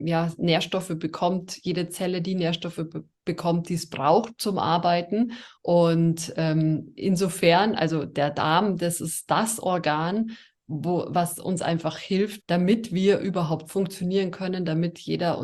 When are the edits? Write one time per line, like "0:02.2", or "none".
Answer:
0:05.6
0:12.4